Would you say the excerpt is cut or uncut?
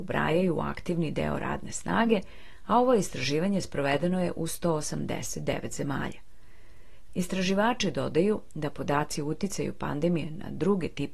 cut